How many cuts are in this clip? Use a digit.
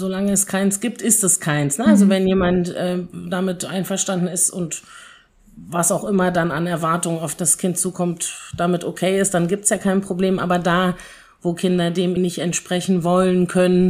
1